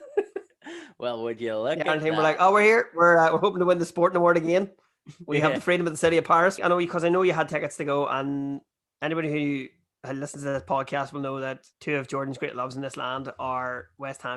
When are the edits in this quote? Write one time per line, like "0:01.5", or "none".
0:06.6
0:11.7